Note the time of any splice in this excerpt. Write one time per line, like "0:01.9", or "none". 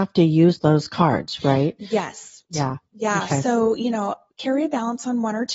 0:02.5